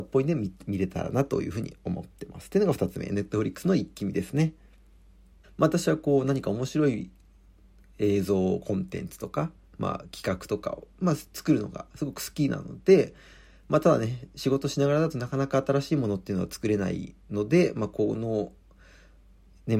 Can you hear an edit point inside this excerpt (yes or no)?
yes